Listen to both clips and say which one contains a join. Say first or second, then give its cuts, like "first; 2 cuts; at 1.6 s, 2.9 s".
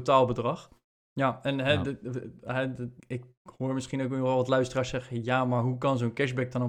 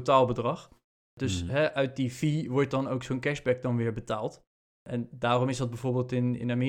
first; 2 cuts; at 1.0 s, 3.0 s